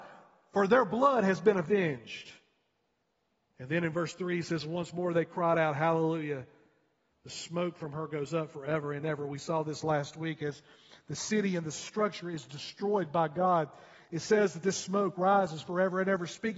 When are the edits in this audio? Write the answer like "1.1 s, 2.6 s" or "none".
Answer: none